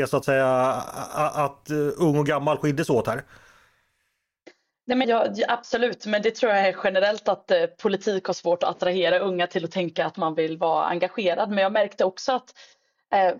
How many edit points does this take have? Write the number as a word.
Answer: one